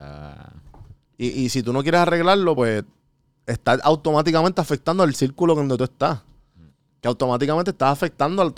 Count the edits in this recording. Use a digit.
0